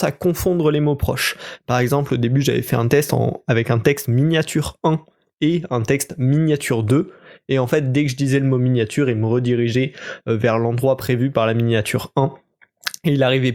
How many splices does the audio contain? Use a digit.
0